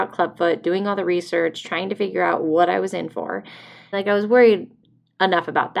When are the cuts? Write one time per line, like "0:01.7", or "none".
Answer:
0:03.9